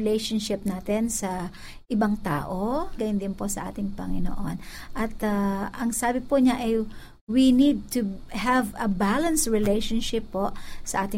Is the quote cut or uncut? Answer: cut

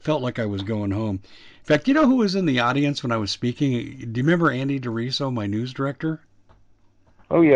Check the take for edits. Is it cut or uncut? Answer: uncut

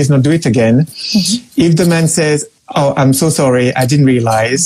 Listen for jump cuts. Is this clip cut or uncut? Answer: uncut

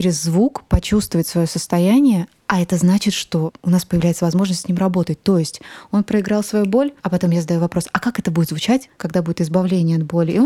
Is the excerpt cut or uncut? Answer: cut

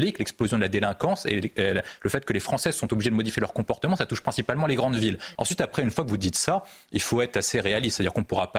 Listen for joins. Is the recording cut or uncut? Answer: cut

